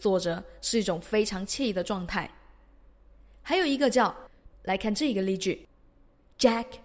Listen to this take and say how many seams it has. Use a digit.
1